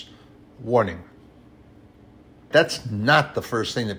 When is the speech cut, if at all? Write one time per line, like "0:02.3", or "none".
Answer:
0:02.5